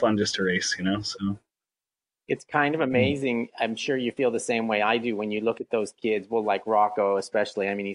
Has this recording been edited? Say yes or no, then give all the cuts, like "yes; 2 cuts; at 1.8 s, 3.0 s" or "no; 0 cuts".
no; 0 cuts